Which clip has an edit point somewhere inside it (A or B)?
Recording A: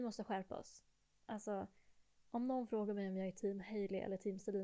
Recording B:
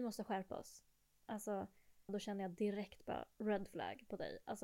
B